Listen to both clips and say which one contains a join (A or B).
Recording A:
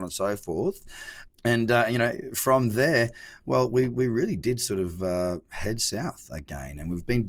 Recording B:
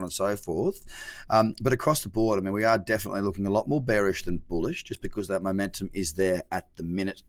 A